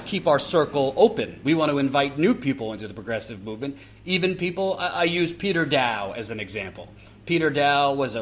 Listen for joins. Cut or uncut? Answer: uncut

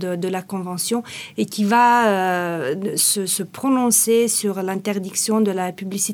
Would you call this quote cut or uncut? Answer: uncut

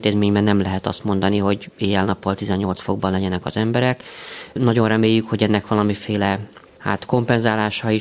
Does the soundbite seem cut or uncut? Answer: uncut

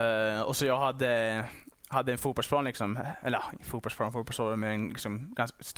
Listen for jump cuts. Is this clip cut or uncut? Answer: uncut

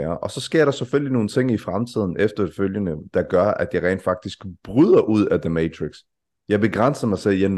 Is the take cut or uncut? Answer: cut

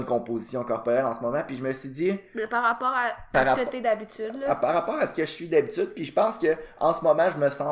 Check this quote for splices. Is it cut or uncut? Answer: uncut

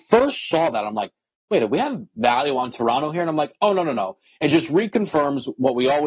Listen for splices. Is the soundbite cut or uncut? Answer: uncut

